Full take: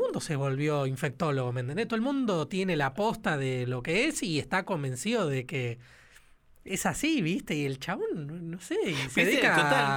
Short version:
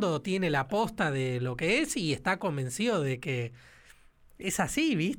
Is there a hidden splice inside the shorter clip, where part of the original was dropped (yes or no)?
no